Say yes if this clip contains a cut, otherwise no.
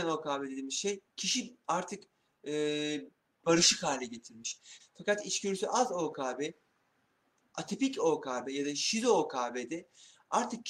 yes